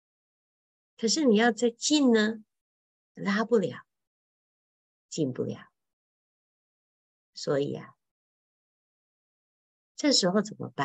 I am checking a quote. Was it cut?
no; 0 cuts

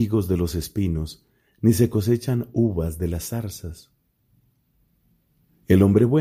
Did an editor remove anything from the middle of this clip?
no; 0 cuts

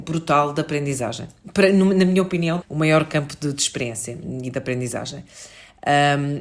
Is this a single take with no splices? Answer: no; 1 cut; at 2.6 s

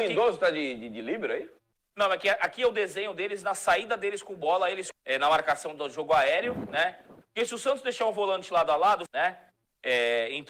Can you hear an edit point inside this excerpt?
yes; 3 cuts; at 4.9 s, 7.2 s, 9.1 s

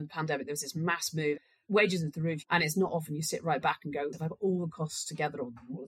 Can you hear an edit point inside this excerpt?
yes; 2 cuts; at 2.4 s, 4.1 s

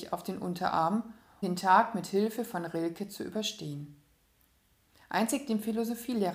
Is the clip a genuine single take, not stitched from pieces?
no; 1 cut; at 1.4 s

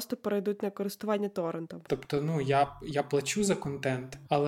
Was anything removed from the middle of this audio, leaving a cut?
yes; 1 cut; at 1.9 s

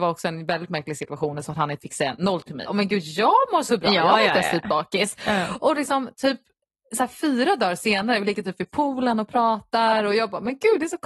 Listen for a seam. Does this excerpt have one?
yes; 1 cut; at 2.6 s

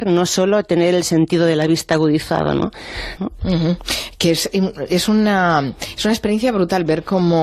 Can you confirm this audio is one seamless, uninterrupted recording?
no; 1 cut; at 3.2 s

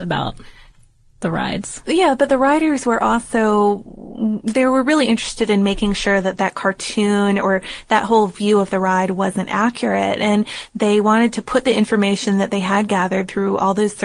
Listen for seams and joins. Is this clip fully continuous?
yes; 0 cuts

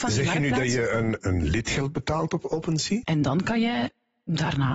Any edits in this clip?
yes; 2 cuts; at 1.2 s, 3.0 s

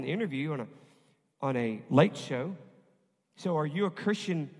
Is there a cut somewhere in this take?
no; 0 cuts

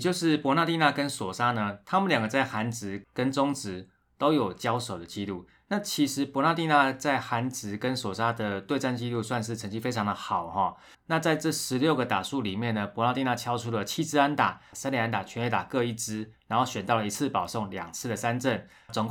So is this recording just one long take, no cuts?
no; 2 cuts; at 10.9 s, 14.7 s

